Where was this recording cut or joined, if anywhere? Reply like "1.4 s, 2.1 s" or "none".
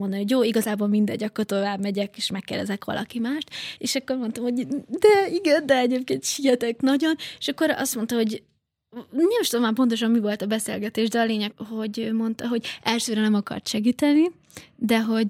3.8 s, 11.5 s